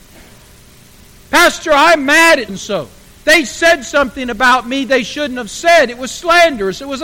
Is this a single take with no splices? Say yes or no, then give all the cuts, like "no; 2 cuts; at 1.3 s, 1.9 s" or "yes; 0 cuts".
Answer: no; 1 cut; at 2.5 s